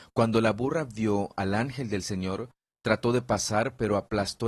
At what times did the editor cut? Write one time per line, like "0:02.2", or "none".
none

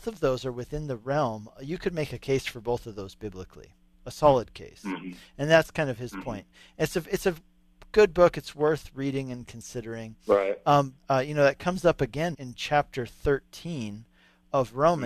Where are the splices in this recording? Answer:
0:11.0
0:12.3

